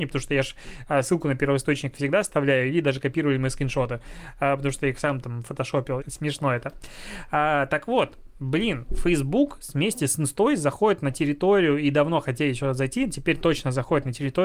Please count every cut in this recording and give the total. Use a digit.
1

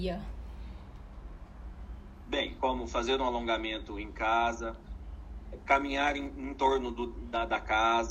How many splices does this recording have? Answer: 1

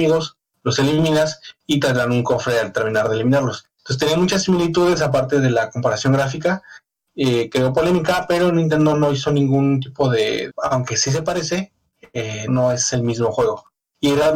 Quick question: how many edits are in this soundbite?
2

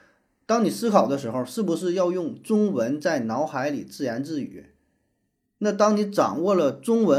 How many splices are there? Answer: 0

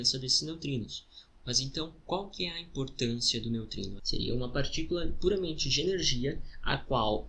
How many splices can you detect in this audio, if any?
2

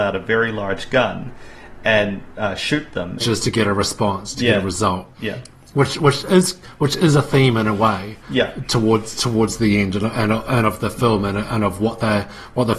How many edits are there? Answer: 1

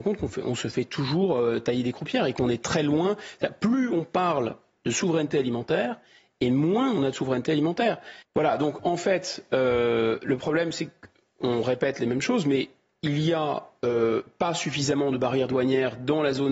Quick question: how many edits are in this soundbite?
1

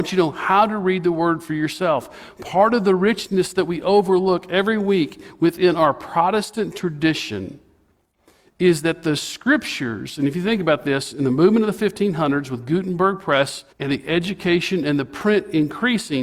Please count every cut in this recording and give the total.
1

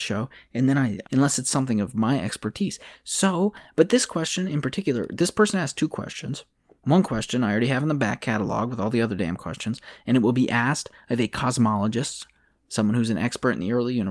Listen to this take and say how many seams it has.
1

